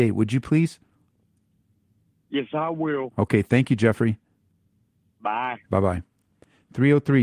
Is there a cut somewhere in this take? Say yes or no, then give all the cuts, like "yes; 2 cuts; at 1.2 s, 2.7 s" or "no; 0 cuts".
no; 0 cuts